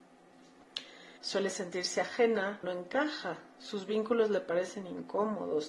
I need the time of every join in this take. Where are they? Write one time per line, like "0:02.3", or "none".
0:01.2
0:02.6